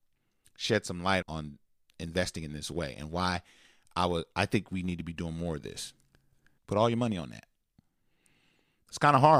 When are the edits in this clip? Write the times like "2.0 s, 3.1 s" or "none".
1.2 s, 6.6 s

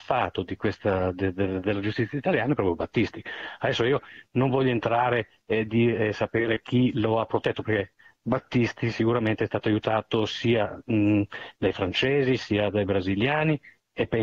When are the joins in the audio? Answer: none

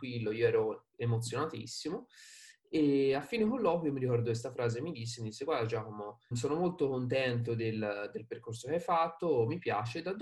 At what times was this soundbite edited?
6.3 s

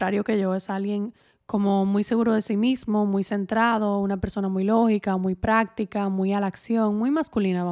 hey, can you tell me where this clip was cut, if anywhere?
none

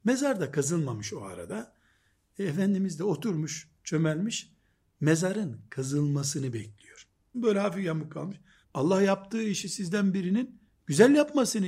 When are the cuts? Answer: 7.3 s, 8.6 s

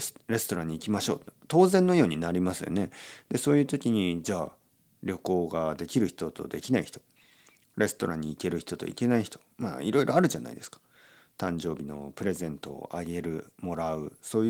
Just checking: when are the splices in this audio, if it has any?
none

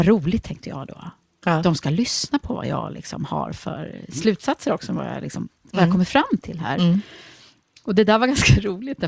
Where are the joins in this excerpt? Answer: none

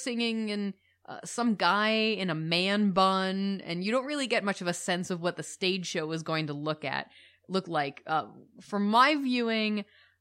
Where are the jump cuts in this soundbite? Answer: none

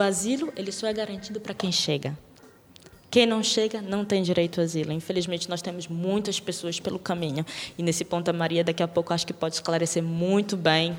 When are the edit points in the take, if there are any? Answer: none

